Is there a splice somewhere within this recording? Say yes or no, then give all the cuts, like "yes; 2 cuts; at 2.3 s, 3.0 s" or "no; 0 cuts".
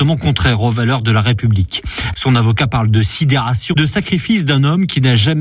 yes; 2 cuts; at 2.1 s, 3.7 s